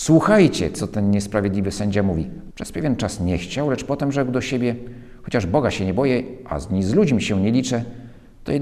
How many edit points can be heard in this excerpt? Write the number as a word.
one